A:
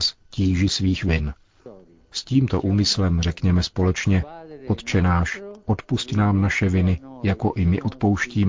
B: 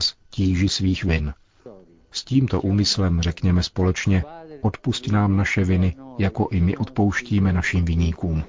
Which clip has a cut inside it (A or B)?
B